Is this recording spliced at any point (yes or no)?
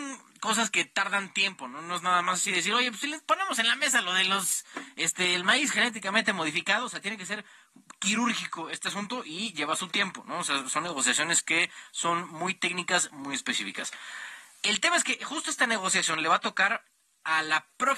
no